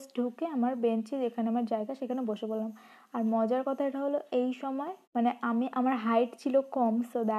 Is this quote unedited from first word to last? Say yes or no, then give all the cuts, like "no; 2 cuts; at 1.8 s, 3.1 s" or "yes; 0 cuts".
no; 1 cut; at 5.0 s